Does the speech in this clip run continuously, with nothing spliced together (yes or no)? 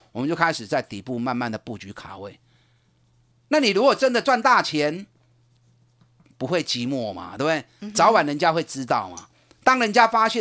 yes